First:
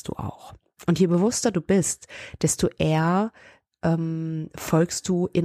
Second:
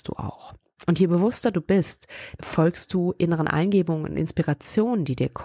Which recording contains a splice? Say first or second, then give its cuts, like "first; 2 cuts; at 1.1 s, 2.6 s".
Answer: second; 1 cut; at 2.4 s